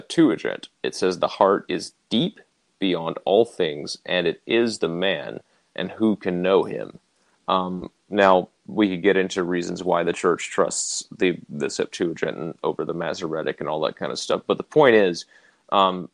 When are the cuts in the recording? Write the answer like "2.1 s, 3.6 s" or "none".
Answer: 7.3 s, 8.6 s